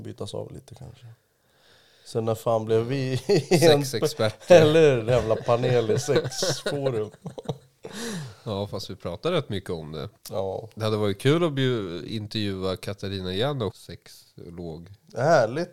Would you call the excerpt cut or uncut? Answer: cut